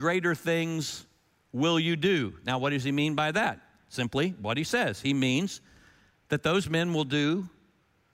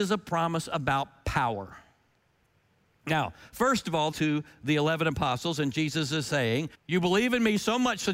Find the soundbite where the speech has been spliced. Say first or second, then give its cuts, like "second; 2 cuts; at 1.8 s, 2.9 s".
second; 2 cuts; at 4.1 s, 6.7 s